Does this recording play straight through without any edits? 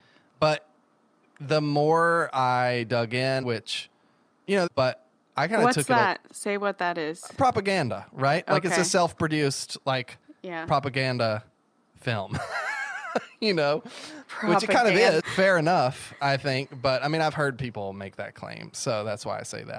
no; 3 cuts; at 3.4 s, 4.7 s, 15.2 s

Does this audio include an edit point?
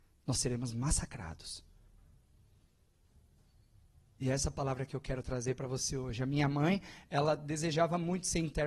no; 0 cuts

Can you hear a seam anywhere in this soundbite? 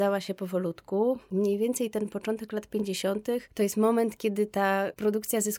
no; 0 cuts

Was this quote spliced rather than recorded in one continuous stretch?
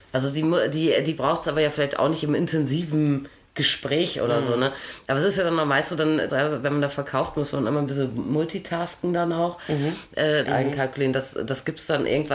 yes; 2 cuts; at 6.3 s, 10.5 s

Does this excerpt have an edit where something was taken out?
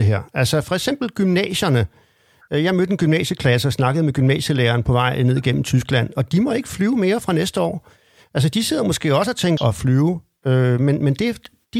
yes; 1 cut; at 9.6 s

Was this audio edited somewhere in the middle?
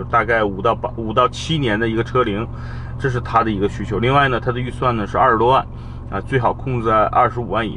yes; 1 cut; at 3.0 s

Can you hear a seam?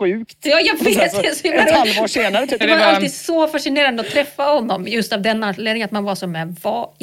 yes; 1 cut; at 2.6 s

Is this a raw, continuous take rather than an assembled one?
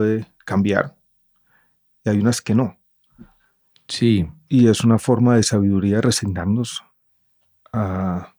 yes; 0 cuts

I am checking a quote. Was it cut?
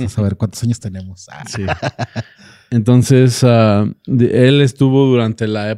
no; 0 cuts

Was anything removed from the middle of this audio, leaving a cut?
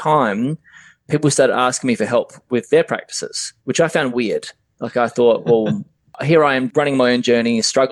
yes; 1 cut; at 3.6 s

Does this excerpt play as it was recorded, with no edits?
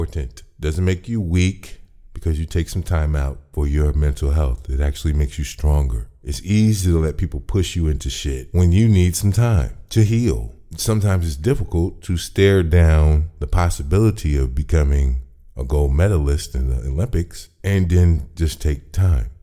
yes; 0 cuts

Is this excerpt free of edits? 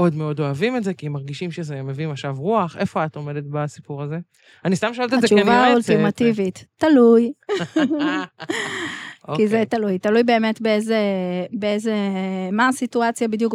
yes; 0 cuts

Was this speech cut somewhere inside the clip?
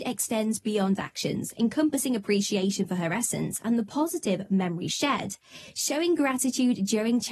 no; 0 cuts

